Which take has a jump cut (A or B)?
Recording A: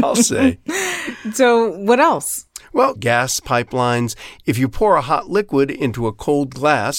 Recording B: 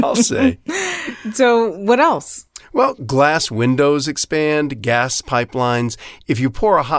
A